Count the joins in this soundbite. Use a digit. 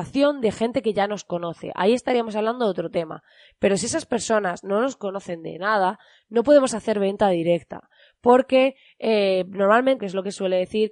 1